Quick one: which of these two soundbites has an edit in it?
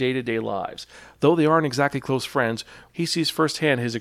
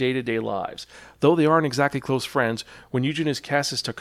first; 1 cut; at 2.9 s

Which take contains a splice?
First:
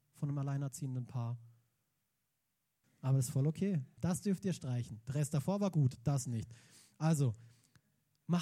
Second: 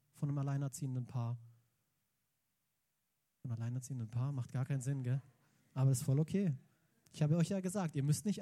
first; 2 cuts; at 2.8 s, 4.0 s

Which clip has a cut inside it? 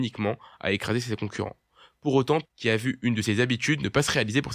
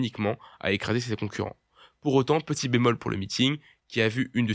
first; 1 cut; at 2.4 s

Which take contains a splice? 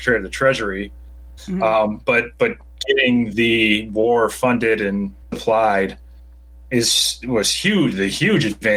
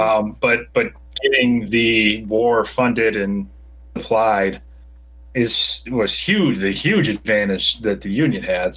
first; 2 cuts; at 1.4 s, 5.2 s

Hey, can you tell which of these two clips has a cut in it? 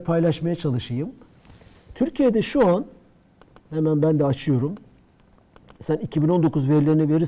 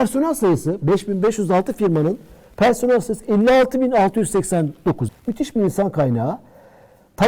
second; 1 cut; at 5.1 s

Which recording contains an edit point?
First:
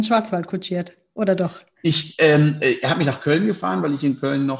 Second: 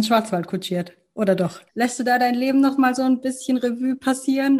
second; 1 cut; at 1.7 s

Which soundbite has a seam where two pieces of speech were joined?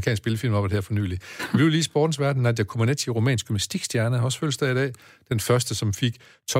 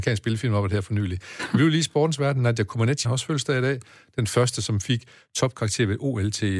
second; 1 cut; at 3.0 s

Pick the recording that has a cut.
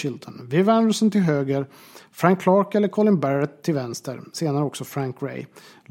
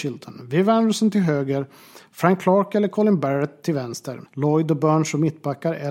second; 1 cut; at 4.3 s

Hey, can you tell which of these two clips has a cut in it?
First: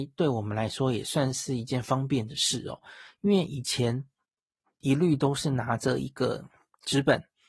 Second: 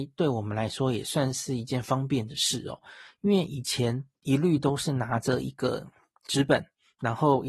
second; 1 cut; at 4.2 s

